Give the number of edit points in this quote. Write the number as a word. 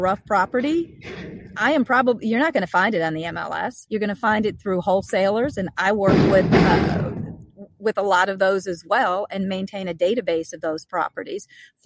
one